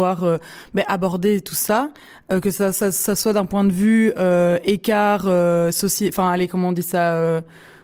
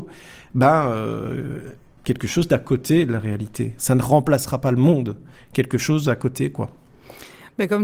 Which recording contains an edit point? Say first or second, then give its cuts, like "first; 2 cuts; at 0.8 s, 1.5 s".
second; 2 cuts; at 3.8 s, 5.4 s